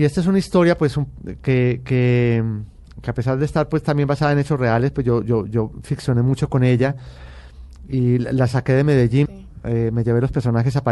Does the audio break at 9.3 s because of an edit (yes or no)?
yes